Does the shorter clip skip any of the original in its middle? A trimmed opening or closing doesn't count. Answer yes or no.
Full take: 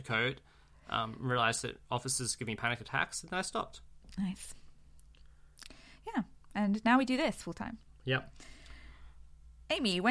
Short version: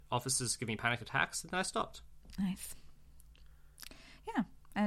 no